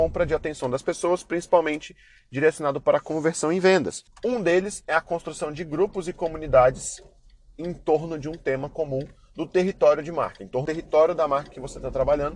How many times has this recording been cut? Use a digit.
1